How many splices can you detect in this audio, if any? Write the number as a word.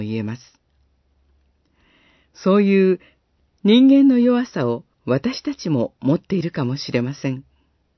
two